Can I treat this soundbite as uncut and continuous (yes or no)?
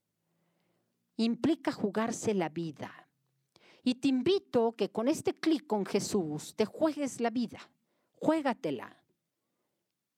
yes